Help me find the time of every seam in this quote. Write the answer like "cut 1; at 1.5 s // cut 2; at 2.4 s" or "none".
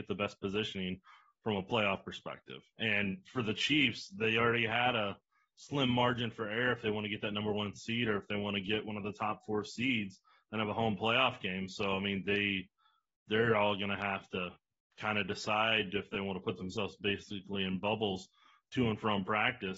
cut 1; at 2.7 s